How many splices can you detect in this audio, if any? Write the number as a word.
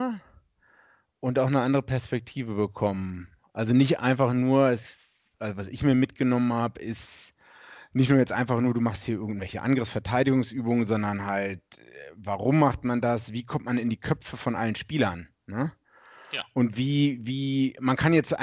zero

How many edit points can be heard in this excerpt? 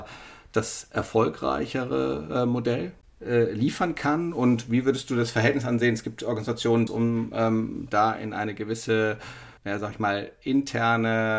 three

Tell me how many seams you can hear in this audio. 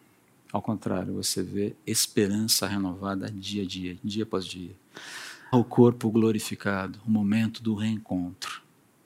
two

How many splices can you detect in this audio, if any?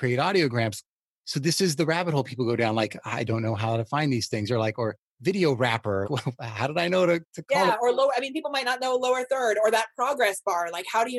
one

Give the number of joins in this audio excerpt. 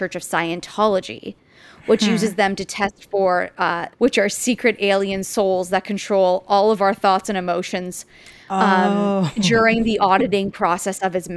one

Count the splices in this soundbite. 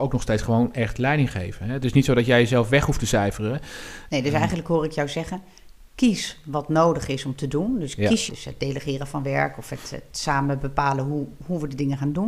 two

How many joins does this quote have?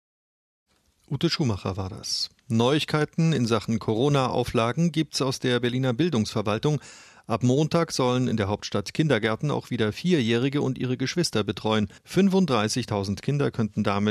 one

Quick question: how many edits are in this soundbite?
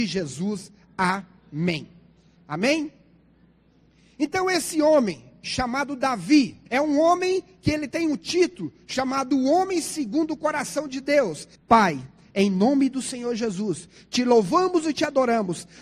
two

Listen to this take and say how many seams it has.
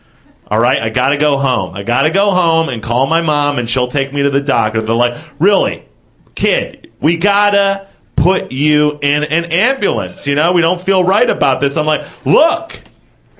zero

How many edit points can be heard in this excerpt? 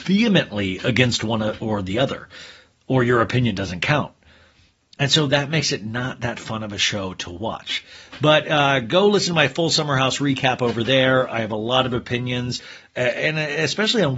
zero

